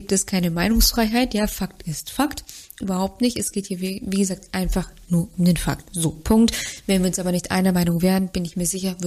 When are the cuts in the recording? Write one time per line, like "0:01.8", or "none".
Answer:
0:02.8